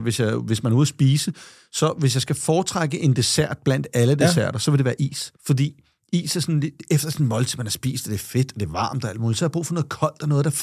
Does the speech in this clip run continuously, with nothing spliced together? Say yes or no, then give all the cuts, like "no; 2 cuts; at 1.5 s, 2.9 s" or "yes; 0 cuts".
no; 1 cut; at 5.4 s